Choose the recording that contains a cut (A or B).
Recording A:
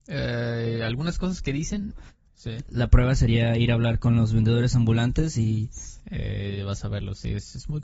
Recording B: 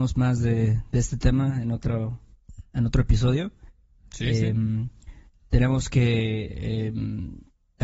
A